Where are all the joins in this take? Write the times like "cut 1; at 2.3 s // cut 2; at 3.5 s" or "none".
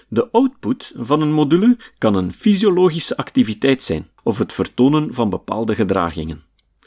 cut 1; at 4.2 s